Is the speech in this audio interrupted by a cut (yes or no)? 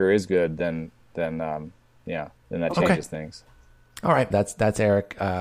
yes